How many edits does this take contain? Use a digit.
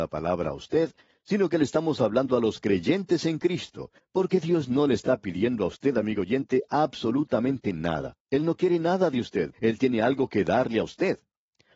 3